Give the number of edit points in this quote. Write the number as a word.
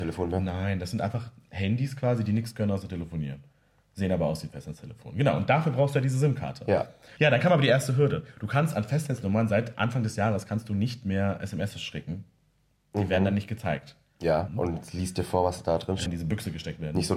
three